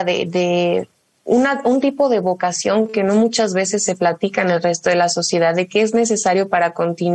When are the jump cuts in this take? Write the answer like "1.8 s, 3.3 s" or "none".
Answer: none